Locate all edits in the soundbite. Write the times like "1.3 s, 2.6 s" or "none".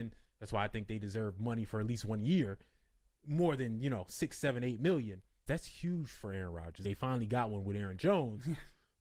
5.5 s, 6.8 s